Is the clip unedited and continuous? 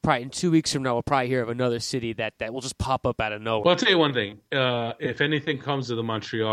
yes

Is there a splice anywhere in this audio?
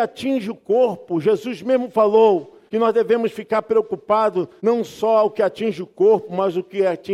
no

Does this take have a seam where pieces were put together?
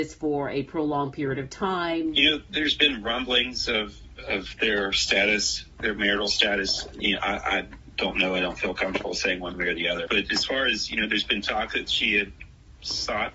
no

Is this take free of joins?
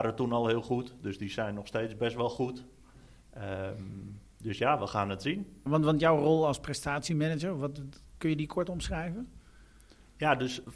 no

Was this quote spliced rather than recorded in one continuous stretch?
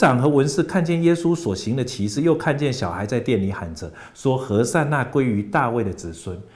no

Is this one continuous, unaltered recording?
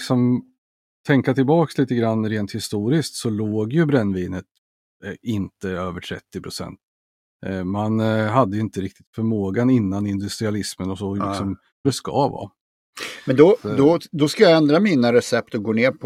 no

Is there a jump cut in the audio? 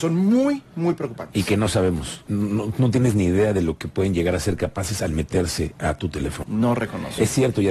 yes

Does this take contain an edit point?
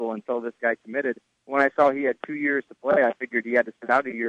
no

